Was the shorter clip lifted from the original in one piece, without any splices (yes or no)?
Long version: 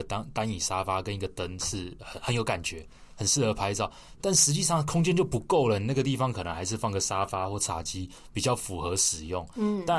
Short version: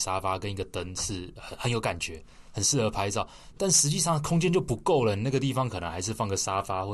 yes